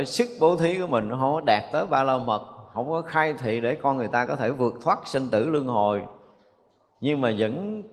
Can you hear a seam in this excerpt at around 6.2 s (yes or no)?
no